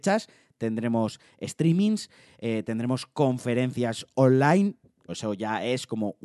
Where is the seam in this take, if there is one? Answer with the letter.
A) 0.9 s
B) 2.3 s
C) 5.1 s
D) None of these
C